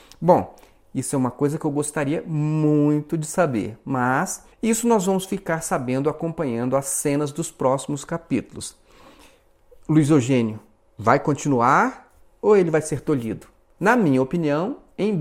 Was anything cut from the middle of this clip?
yes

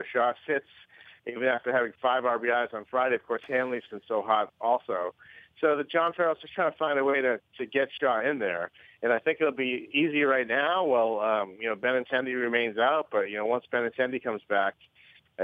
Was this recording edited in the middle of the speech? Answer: no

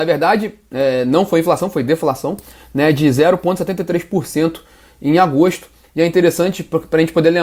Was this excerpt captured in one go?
no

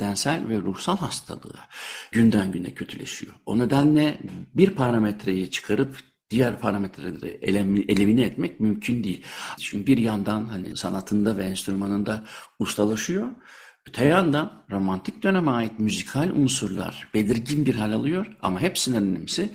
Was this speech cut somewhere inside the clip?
yes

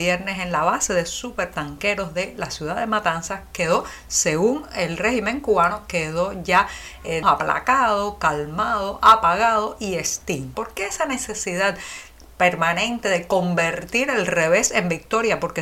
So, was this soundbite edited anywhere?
yes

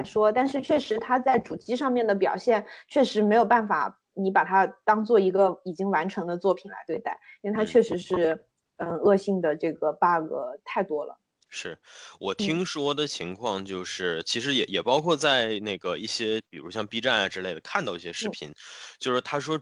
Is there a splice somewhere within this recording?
no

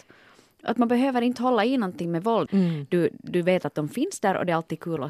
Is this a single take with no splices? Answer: no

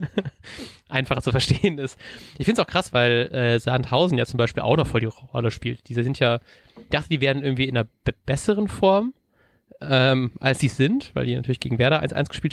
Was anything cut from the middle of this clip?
yes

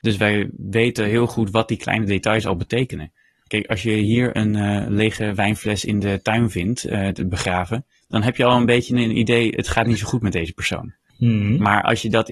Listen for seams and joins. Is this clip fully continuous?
yes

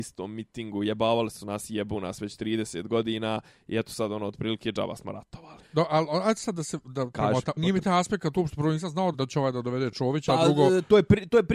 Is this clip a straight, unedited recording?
no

